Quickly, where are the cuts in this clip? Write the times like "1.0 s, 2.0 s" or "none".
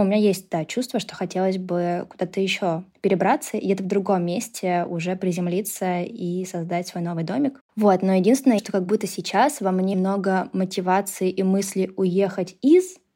8.6 s, 9.9 s